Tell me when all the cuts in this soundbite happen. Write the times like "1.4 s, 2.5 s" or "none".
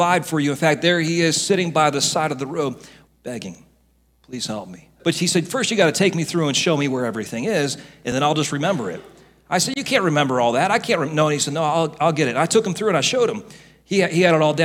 3.1 s, 5.0 s